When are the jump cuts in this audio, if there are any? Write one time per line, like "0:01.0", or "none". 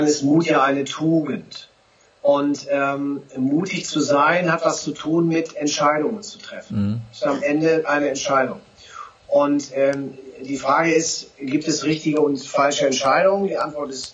none